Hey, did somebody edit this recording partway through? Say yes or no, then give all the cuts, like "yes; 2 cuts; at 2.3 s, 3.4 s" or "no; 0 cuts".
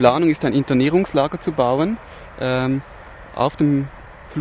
no; 0 cuts